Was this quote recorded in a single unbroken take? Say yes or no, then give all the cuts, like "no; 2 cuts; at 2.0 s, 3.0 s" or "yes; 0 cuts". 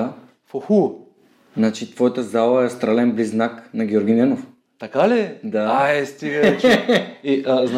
yes; 0 cuts